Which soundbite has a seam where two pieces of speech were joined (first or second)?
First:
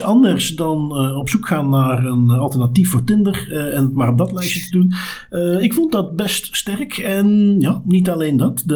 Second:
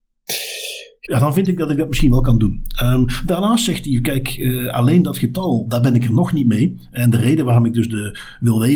second